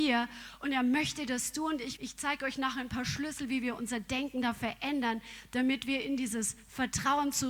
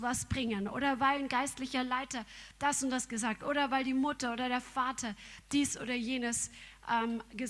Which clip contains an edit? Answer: first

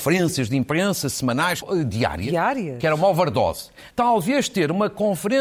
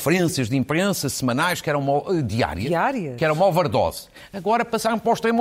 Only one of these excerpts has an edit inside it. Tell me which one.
first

